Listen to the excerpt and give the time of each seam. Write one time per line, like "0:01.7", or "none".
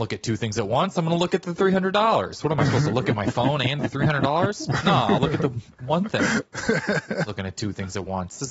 none